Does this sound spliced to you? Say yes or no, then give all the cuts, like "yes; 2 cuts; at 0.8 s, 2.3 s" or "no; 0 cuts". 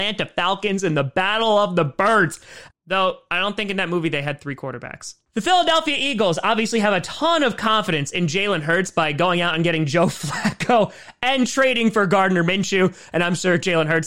yes; 1 cut; at 2.7 s